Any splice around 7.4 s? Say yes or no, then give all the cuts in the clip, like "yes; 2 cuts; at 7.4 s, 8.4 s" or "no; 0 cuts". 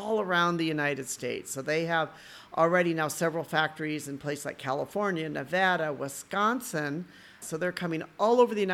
yes; 1 cut; at 7.4 s